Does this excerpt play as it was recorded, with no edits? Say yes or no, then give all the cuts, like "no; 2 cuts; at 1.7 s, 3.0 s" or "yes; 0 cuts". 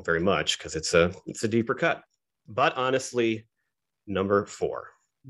yes; 0 cuts